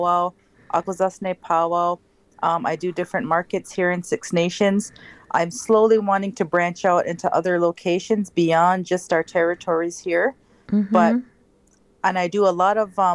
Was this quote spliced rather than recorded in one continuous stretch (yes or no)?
no